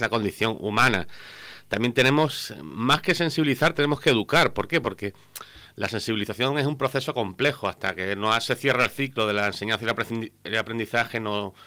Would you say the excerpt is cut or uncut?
uncut